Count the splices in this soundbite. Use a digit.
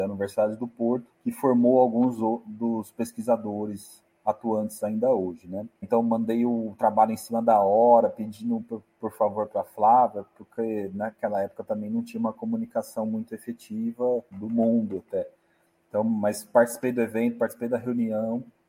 3